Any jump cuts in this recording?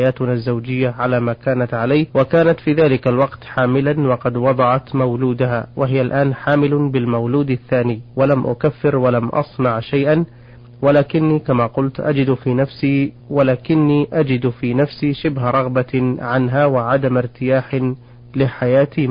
yes; 3 cuts; at 2.1 s, 8.1 s, 13.2 s

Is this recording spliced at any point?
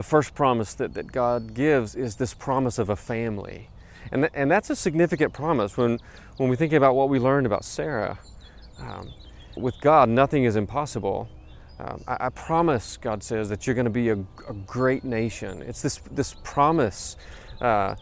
yes; 1 cut; at 9.6 s

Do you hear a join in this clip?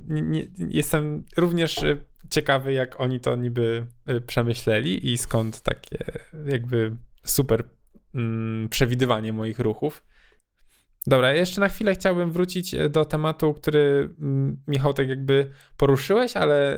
no; 0 cuts

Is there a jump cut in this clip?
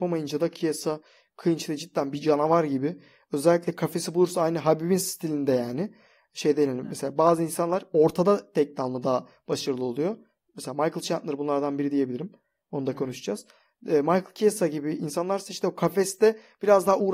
no; 0 cuts

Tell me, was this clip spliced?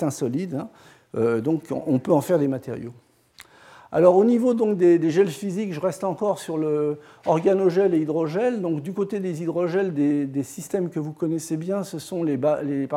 no; 0 cuts

